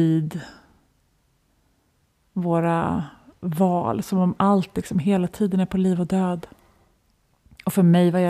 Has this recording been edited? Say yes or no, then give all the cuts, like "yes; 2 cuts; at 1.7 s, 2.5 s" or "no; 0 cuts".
no; 0 cuts